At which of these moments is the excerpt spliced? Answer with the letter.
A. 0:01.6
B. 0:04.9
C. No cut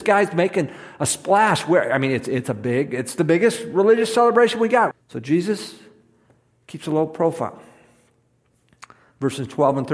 B